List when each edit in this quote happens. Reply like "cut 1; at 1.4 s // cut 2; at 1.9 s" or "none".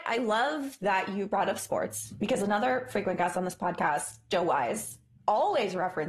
none